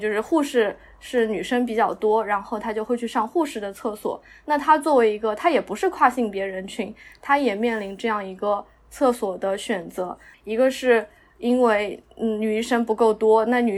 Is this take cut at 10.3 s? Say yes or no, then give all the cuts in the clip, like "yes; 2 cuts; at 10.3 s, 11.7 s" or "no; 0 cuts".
yes; 1 cut; at 10.3 s